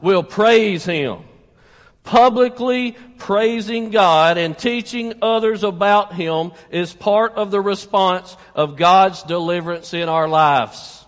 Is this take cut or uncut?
uncut